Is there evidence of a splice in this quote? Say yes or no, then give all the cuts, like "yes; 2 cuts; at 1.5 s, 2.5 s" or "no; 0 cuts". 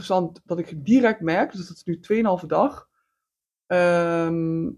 no; 0 cuts